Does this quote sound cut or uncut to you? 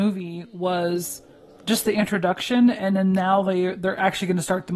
uncut